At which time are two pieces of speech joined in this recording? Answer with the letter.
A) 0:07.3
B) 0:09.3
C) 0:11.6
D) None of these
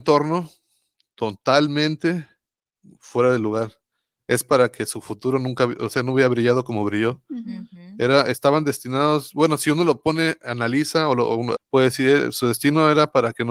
C